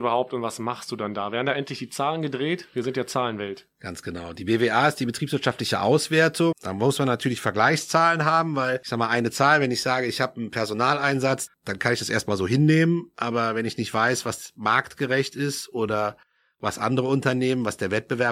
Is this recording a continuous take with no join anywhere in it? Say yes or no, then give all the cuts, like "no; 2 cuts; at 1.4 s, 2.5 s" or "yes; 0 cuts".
no; 2 cuts; at 6.5 s, 11.5 s